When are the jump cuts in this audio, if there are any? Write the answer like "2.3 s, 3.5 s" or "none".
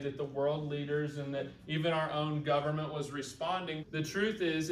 3.8 s